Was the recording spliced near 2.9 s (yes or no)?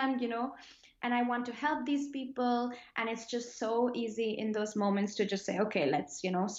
no